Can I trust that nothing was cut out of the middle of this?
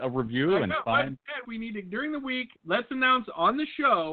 no; 2 cuts; at 1.4 s, 2.6 s

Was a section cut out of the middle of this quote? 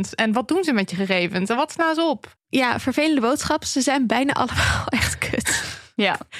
yes; 1 cut; at 2.4 s

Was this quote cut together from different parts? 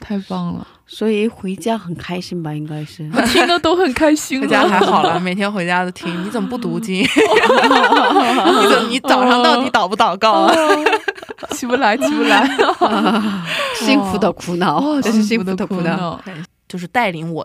yes; 2 cuts; at 15.0 s, 16.4 s

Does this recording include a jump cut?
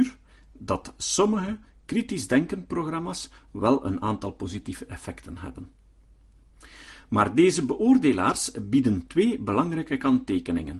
no; 0 cuts

